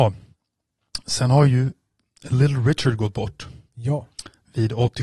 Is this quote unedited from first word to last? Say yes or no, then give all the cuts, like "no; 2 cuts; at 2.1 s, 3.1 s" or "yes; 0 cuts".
yes; 0 cuts